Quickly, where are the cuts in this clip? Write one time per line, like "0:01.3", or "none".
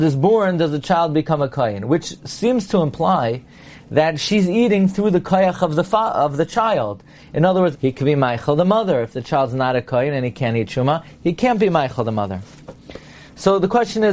0:07.7